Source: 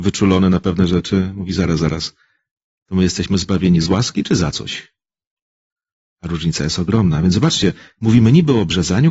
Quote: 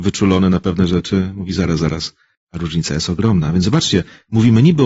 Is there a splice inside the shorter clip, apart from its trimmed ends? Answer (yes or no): yes